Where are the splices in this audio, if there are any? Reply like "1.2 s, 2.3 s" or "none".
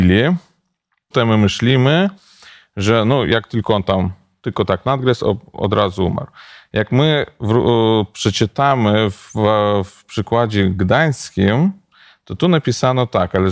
1.1 s